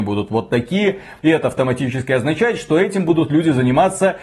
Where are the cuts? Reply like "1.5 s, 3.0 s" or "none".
1.2 s